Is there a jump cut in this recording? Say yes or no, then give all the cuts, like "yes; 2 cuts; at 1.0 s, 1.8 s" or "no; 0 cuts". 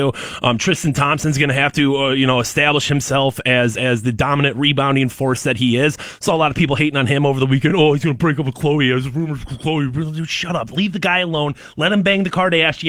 no; 0 cuts